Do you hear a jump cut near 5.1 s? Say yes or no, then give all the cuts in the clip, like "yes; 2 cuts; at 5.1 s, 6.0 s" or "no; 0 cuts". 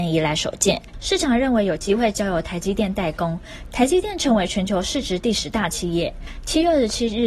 no; 2 cuts; at 0.9 s, 3.7 s